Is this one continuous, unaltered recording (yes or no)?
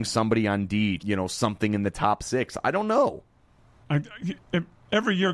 no